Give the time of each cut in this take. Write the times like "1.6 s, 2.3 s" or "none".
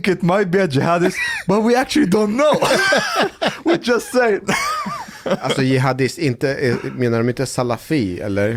none